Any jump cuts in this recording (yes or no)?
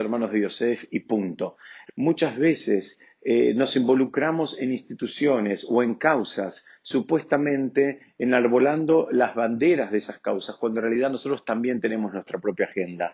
yes